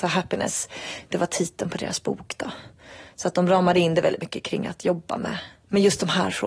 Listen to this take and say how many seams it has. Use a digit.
0